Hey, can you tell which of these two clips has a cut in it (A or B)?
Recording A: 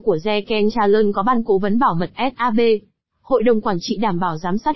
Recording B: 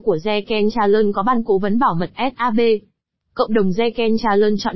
A